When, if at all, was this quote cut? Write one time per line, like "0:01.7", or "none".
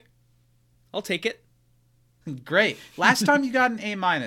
0:02.2